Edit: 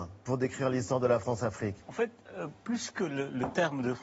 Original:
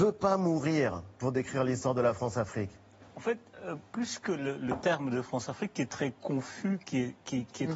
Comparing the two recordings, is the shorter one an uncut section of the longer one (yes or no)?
no